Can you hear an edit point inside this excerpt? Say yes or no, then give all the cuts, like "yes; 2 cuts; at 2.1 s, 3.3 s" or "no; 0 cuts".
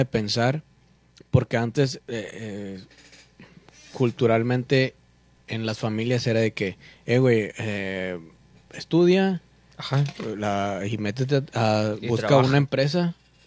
no; 0 cuts